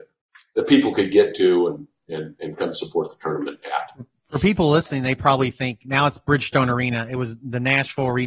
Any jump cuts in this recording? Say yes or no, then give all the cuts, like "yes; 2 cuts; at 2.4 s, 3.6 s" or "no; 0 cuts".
no; 0 cuts